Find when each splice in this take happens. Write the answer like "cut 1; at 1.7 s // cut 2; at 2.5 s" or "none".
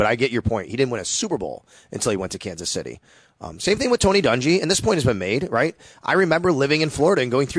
none